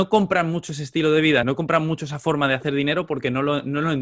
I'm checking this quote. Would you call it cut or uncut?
cut